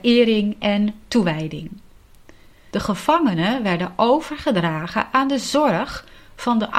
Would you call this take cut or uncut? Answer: cut